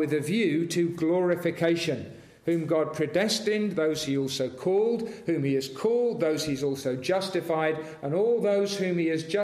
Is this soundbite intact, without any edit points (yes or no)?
yes